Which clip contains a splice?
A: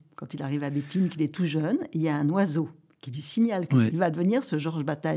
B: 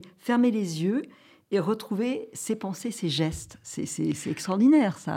A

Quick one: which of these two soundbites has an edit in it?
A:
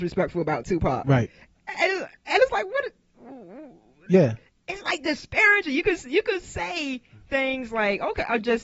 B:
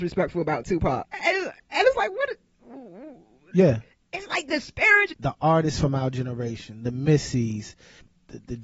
B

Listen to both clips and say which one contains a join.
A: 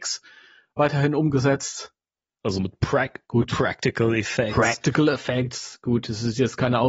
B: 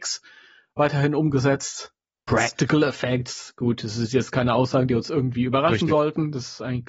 B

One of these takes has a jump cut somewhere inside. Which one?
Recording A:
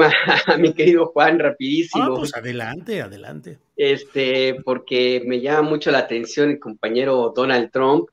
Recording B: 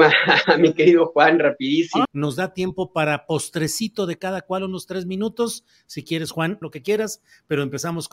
B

